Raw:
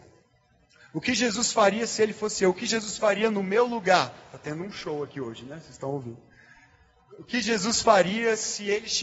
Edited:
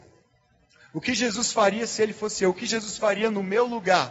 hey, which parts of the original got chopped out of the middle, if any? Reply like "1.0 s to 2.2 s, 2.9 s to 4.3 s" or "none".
none